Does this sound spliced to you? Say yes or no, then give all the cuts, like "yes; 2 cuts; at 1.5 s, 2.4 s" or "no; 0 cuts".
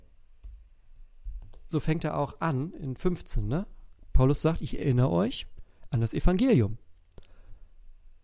no; 0 cuts